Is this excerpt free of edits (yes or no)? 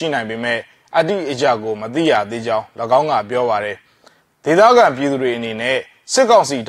yes